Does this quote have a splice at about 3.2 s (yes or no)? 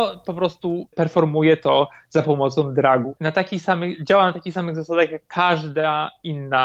yes